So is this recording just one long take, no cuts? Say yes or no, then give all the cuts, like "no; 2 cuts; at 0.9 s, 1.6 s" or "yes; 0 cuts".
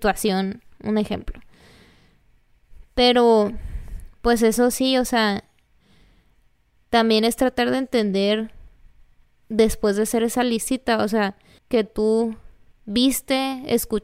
no; 1 cut; at 11.6 s